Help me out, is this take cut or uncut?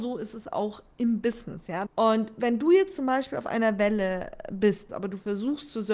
cut